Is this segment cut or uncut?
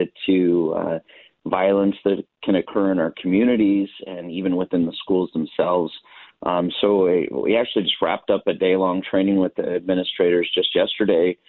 uncut